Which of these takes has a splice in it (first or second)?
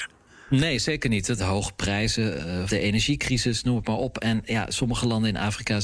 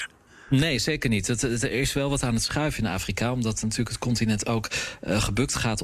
first